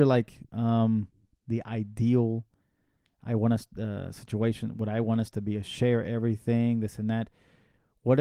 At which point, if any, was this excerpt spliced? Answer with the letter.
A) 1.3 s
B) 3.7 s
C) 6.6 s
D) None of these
A